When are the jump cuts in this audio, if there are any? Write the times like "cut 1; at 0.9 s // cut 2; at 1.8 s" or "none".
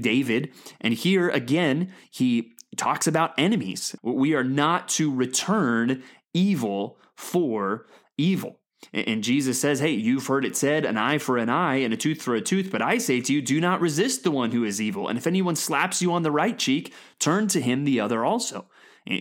cut 1; at 4.0 s